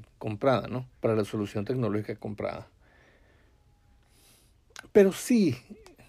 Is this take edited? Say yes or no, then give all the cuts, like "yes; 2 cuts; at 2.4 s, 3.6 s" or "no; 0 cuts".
yes; 1 cut; at 1.0 s